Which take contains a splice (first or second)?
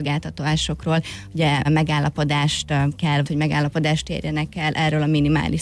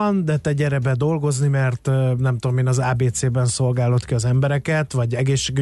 first